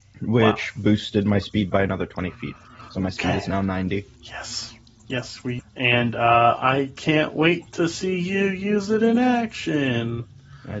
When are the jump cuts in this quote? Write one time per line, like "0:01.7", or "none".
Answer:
0:04.1
0:05.6